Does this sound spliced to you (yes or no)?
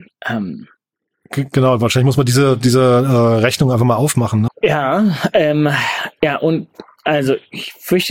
yes